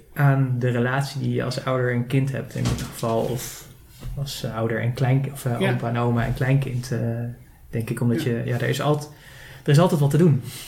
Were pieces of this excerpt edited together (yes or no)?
no